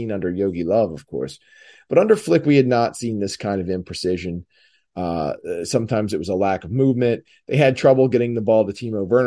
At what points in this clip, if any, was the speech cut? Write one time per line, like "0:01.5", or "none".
none